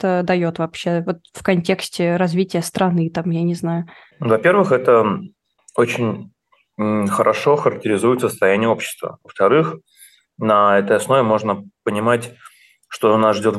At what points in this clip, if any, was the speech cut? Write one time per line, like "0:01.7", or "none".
none